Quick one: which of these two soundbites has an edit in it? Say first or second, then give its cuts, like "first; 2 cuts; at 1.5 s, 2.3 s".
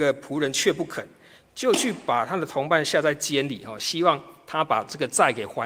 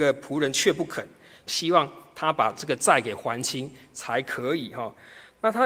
second; 1 cut; at 1.5 s